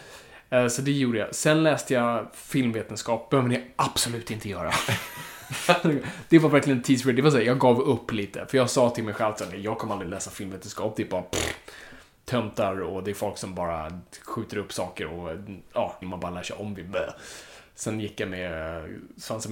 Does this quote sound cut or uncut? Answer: cut